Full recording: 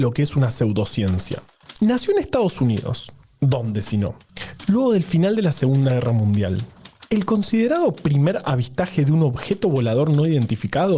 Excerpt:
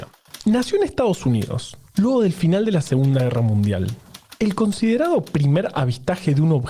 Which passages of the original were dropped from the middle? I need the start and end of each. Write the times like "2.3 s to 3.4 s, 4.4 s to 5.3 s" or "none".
3.3 s to 4.7 s